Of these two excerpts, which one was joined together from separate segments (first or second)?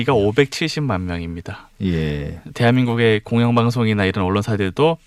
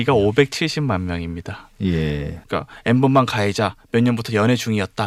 second